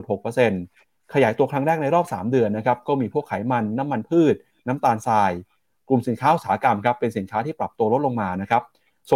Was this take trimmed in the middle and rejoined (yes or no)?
no